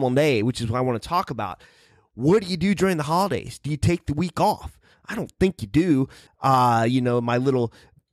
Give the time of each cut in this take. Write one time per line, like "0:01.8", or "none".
0:06.3